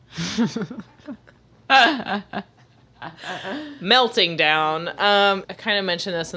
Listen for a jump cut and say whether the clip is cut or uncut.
cut